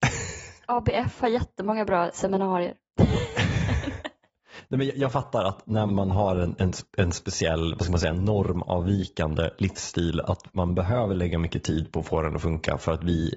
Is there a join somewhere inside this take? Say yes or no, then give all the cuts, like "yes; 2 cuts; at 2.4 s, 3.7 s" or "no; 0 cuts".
yes; 1 cut; at 5.9 s